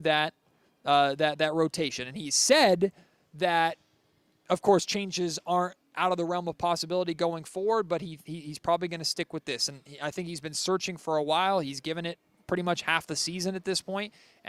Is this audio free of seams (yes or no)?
yes